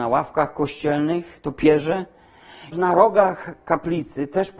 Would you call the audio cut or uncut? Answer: cut